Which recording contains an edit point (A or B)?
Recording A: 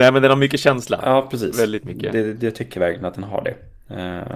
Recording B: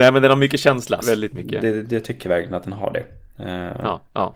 B